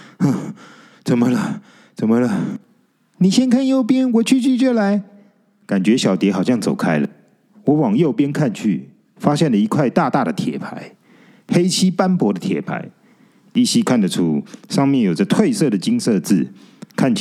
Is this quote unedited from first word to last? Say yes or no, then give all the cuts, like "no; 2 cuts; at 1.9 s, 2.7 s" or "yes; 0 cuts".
yes; 0 cuts